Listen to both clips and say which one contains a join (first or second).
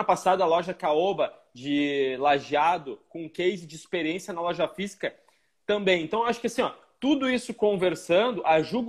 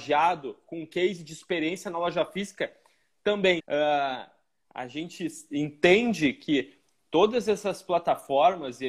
second